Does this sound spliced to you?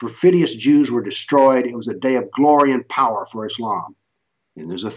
no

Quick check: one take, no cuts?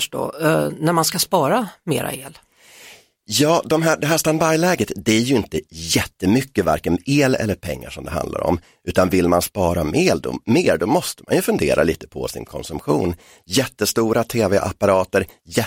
yes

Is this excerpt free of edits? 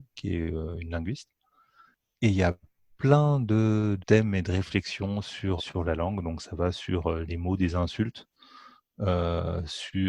no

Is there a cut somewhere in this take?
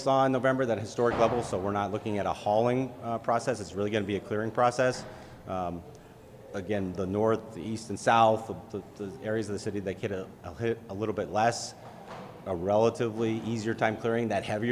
no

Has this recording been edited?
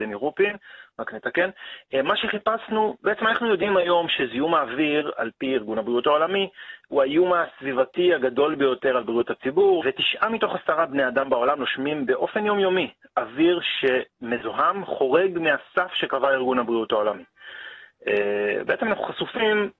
yes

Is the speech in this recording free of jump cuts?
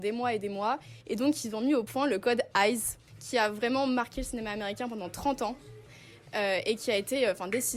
no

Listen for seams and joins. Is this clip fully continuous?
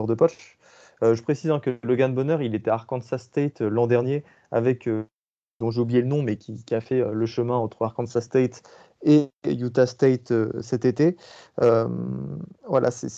no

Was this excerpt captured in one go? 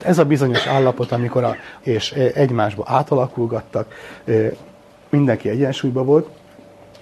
no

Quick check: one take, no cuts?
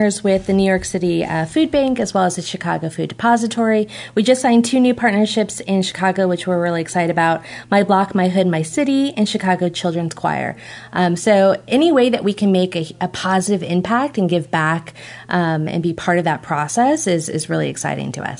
yes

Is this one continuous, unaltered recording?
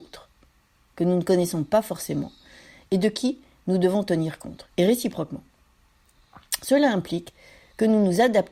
yes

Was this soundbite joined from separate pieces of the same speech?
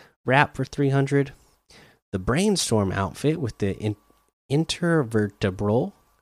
no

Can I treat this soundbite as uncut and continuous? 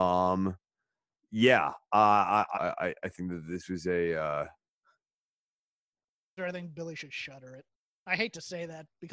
no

